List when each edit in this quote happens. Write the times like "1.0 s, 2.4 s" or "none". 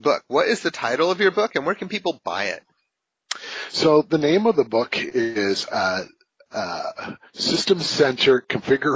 none